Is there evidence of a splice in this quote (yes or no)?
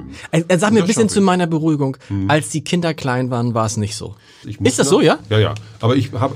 yes